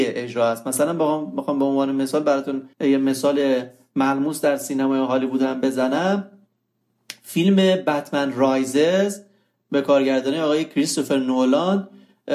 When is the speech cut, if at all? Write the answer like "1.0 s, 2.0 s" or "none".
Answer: 2.7 s

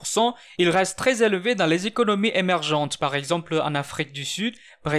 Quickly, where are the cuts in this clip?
none

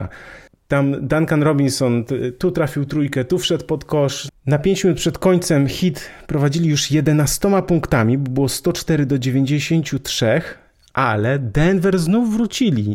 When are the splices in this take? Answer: 4.3 s

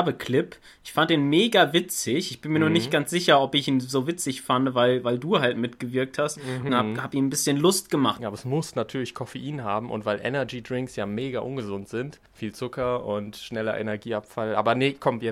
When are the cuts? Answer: 6.7 s, 8.2 s, 12.3 s

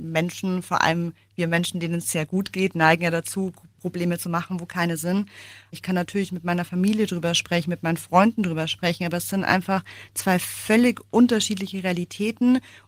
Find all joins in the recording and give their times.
5.7 s

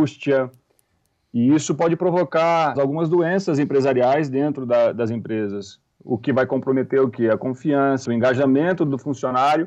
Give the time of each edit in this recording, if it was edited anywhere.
2.8 s, 8.1 s

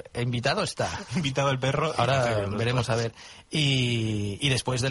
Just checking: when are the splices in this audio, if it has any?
none

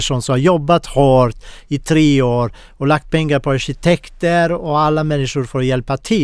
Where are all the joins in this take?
none

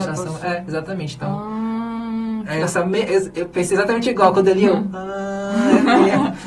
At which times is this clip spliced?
2.6 s

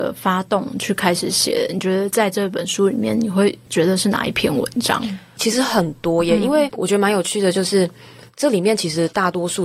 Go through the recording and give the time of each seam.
none

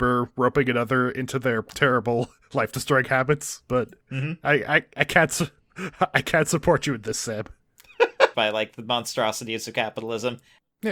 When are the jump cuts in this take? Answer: 4.0 s, 8.3 s

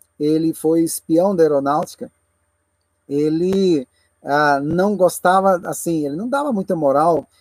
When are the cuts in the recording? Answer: none

